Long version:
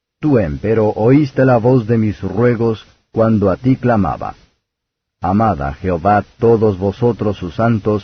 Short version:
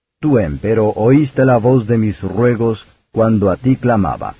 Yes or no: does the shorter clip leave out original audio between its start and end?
no